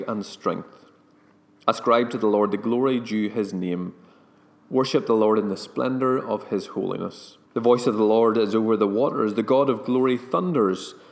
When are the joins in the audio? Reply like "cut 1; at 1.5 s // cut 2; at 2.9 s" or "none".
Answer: cut 1; at 7.4 s